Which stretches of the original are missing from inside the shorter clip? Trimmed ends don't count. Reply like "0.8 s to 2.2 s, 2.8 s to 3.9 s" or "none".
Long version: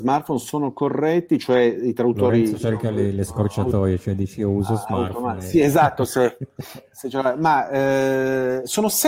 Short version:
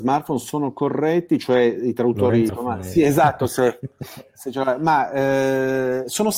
2.5 s to 5.1 s